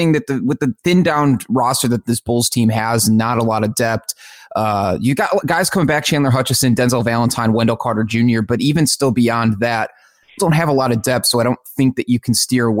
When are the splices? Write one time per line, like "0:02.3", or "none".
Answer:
0:10.4